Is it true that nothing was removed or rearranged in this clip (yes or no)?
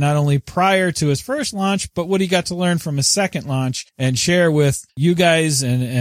yes